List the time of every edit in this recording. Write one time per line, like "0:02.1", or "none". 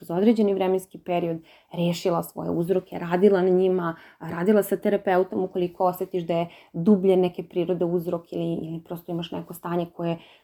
none